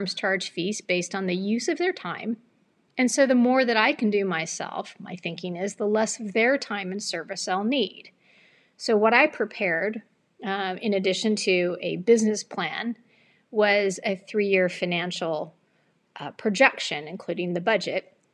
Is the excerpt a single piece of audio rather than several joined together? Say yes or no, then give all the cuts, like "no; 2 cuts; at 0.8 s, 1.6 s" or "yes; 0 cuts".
yes; 0 cuts